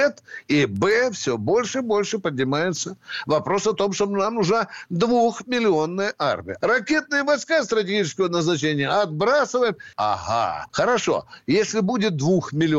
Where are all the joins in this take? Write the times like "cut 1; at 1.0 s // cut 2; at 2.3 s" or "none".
cut 1; at 6.6 s // cut 2; at 9.9 s